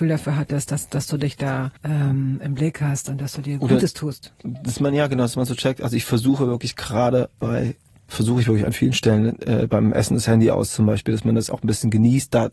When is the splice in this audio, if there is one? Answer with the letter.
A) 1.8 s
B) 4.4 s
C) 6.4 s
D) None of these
A